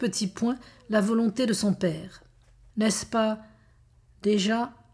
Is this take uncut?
no; 1 cut; at 2.7 s

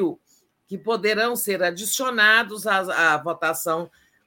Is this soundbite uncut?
yes; 0 cuts

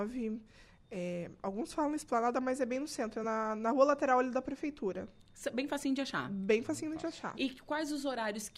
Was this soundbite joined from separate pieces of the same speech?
no; 0 cuts

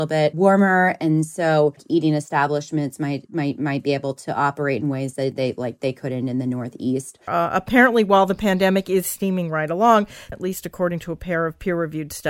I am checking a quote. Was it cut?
yes; 2 cuts; at 7.3 s, 10.3 s

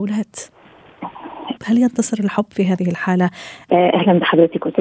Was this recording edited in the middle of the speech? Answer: yes; 2 cuts; at 1.6 s, 3.7 s

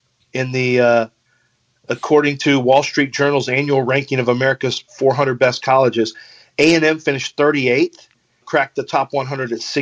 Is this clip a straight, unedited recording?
no; 1 cut; at 8.4 s

